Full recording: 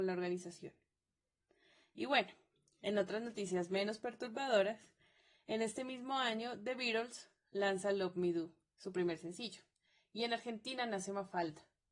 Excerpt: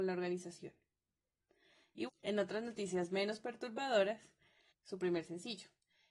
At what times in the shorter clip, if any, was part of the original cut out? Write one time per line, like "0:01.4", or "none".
0:02.1
0:04.7